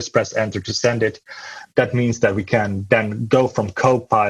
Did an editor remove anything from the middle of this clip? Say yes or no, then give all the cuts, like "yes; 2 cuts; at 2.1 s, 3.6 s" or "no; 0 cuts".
no; 0 cuts